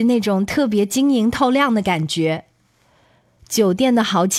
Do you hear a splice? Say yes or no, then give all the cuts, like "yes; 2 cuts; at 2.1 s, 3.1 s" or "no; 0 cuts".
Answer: no; 0 cuts